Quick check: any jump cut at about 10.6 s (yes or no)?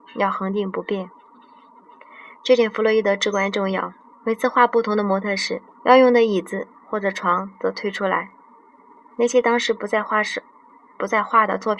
no